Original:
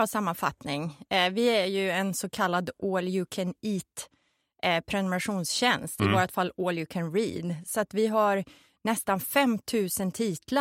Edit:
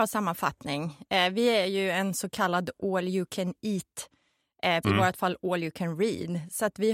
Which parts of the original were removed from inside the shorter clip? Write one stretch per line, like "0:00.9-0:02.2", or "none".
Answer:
0:04.8-0:06.0